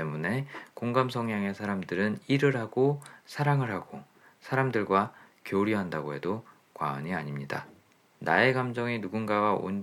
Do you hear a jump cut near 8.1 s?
yes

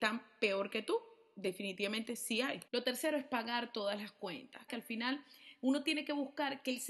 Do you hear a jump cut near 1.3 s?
no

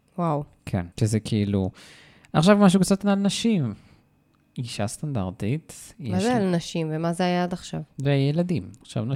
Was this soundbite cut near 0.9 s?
yes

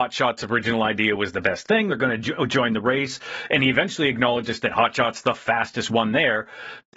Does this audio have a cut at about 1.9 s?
no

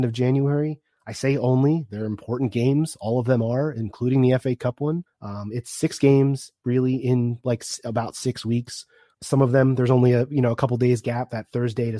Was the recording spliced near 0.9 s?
no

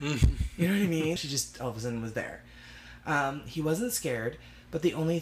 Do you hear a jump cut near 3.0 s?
no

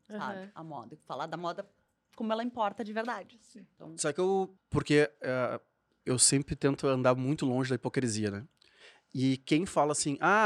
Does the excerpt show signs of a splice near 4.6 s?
yes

